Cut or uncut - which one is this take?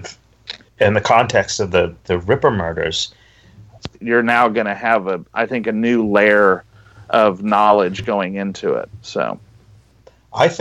cut